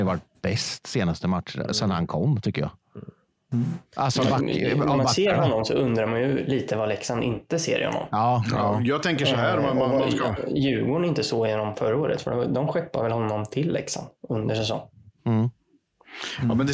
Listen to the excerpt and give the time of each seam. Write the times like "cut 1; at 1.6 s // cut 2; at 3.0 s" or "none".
none